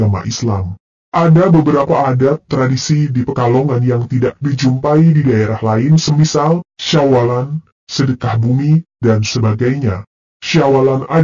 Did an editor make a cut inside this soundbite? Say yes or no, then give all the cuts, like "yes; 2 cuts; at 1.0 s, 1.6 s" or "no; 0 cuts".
no; 0 cuts